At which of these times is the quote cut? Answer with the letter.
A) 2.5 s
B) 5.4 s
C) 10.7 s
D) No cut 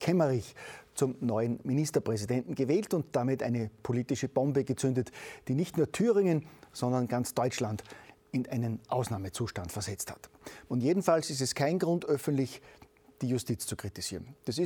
C